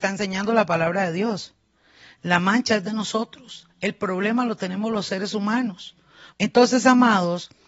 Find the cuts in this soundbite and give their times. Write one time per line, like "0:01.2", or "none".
0:06.3